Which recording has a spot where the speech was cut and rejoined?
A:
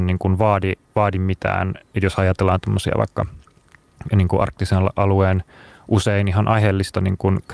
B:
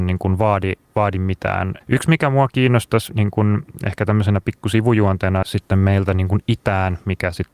B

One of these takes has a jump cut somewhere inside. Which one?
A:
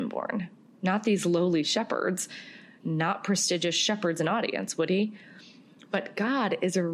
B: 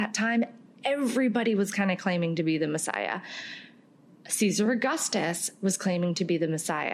A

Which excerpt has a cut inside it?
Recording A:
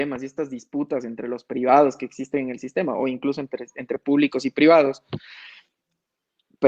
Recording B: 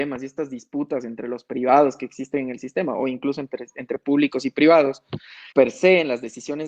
B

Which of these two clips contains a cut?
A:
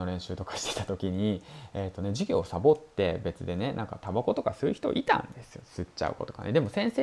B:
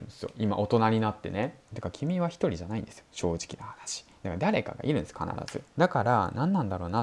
B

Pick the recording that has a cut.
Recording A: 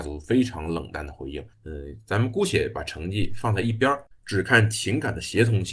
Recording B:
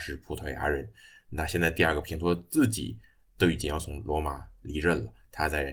A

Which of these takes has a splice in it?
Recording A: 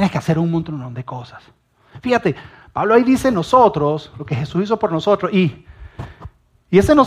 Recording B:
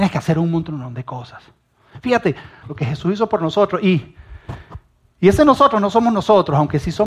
B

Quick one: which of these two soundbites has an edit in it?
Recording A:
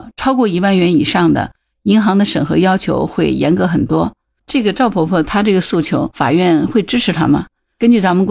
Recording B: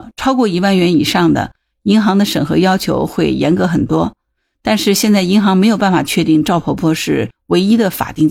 A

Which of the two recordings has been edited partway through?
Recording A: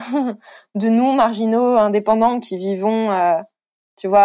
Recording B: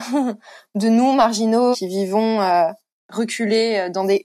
B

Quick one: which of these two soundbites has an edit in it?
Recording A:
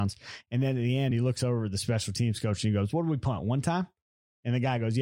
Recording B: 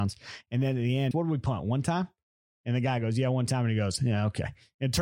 B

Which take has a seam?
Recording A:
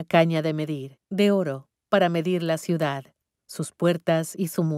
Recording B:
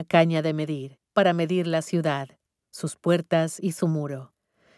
B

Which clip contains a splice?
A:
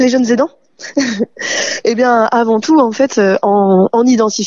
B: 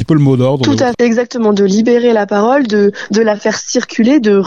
B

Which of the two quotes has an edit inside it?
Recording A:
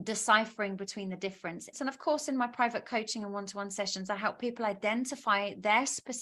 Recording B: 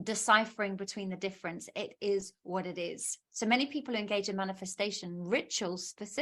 A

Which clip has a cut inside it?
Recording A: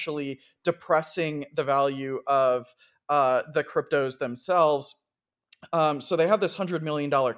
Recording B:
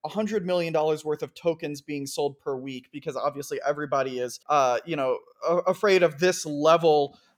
B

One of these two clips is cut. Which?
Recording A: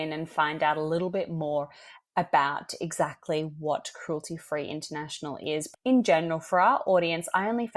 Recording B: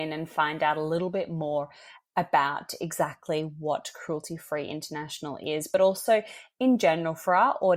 A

